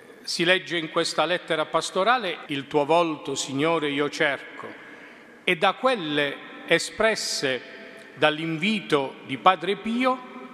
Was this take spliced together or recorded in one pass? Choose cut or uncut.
cut